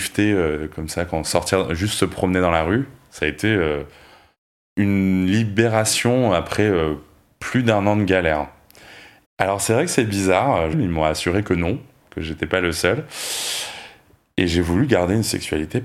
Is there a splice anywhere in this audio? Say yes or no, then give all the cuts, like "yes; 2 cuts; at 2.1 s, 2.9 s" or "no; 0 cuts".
yes; 2 cuts; at 9.2 s, 10.7 s